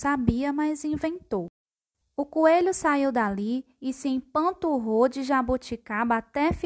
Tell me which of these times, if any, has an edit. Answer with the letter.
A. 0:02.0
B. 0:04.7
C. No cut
A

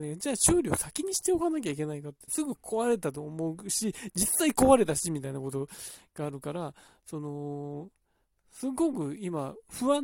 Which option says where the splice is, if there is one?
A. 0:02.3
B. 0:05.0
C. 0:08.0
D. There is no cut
A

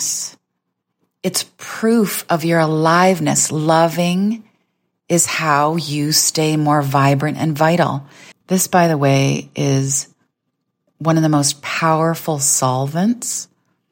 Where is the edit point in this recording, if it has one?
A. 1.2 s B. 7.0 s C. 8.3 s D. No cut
C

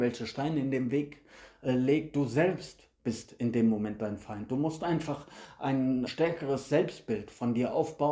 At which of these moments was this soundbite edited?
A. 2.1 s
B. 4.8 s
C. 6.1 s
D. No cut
C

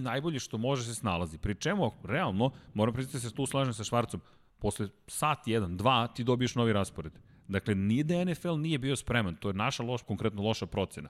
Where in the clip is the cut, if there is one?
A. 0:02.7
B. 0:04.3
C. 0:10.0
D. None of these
C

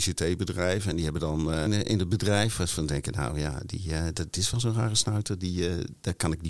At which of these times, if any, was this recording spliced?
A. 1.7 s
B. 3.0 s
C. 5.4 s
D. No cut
A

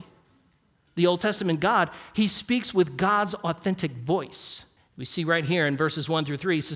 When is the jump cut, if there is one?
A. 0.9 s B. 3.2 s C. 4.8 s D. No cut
C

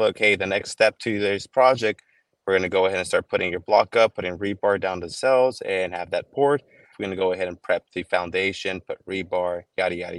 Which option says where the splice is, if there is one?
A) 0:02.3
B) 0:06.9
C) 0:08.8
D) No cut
B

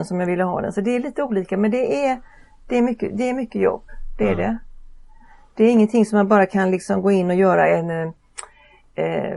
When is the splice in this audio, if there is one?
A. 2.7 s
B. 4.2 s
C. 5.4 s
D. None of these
D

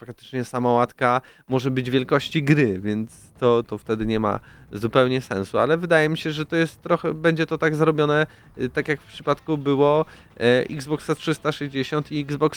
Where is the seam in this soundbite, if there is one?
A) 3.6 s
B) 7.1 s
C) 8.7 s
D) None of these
A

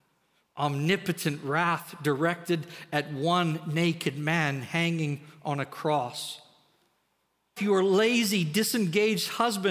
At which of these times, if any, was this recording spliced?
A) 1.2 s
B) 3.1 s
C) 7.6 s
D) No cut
C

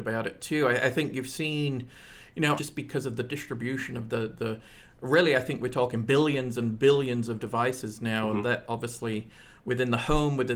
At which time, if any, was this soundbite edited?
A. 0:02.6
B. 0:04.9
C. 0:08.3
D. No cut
A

